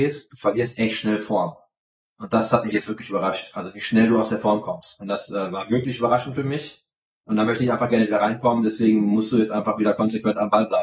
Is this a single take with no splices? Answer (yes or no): yes